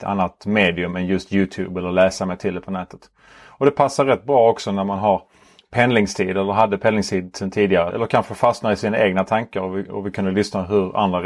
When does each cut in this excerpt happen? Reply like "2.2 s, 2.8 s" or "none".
7.9 s

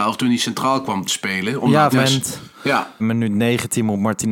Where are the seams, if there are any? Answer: 1.9 s, 3.0 s

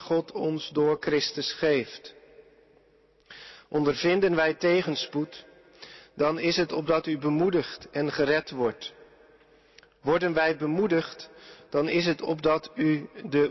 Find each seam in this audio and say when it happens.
none

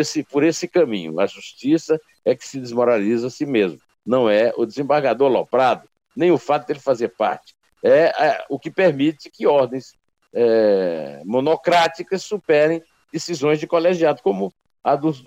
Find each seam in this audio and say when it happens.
none

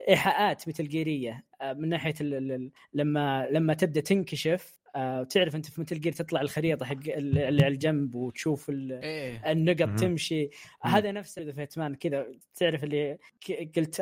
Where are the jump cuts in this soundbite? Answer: none

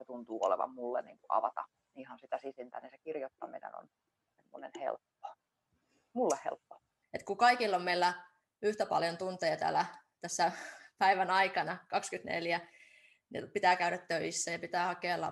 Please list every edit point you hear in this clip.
7.0 s

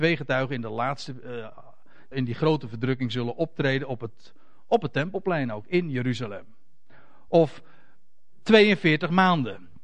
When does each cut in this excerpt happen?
2.1 s, 7.3 s

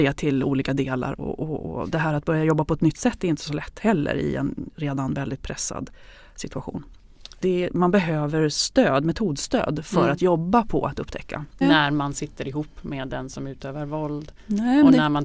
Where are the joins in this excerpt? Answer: 1.1 s, 7.4 s, 11.6 s

